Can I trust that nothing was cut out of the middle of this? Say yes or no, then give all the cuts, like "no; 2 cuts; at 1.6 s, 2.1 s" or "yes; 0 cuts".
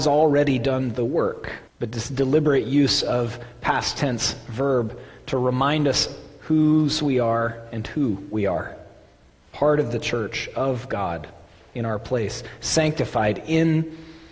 no; 1 cut; at 1.7 s